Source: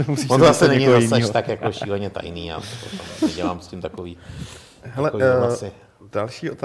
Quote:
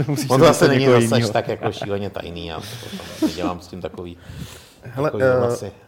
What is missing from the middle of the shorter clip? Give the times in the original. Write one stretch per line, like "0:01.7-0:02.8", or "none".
none

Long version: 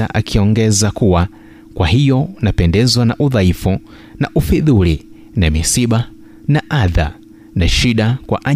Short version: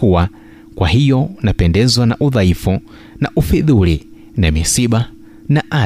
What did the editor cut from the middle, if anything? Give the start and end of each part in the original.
none

